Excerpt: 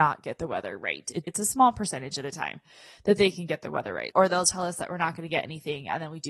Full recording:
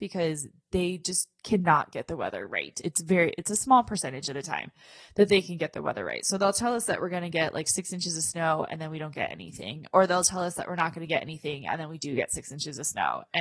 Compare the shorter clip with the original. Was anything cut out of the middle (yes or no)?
yes